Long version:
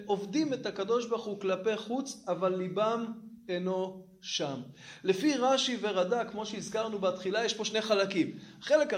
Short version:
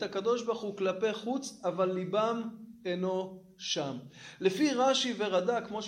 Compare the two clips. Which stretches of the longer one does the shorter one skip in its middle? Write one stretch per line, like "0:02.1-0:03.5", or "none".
none